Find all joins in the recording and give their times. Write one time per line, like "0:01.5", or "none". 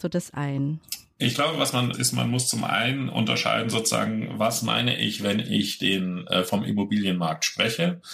0:01.9

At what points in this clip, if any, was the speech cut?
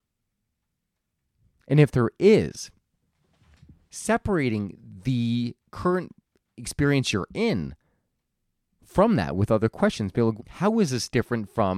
0:10.4

